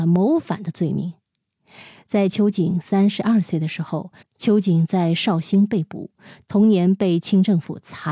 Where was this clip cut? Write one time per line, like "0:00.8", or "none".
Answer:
0:04.2

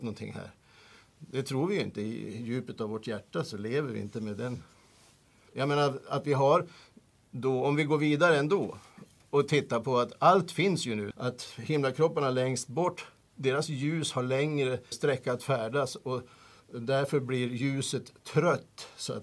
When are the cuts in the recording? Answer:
0:05.5
0:11.1
0:14.9

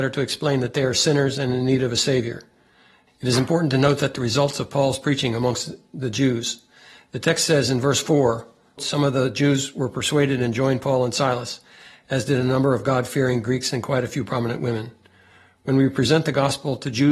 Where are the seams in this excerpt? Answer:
0:03.1
0:08.8

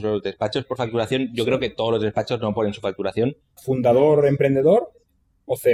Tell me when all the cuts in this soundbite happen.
0:03.6

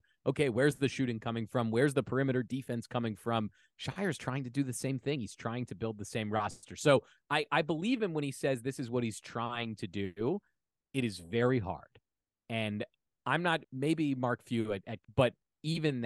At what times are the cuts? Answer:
0:13.6
0:15.0

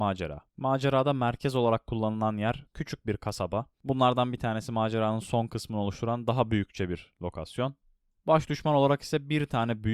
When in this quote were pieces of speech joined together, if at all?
0:03.7

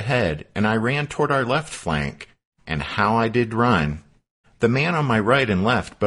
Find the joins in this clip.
0:04.4

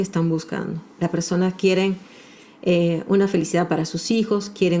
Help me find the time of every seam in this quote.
none

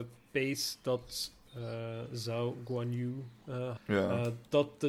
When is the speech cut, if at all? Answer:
0:03.8

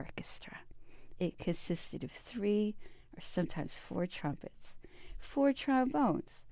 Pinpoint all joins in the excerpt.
0:01.2

